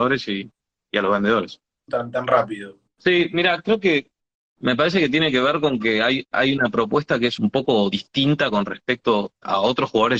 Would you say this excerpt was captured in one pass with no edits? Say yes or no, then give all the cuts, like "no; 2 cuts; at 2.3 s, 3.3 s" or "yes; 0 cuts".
no; 1 cut; at 1.9 s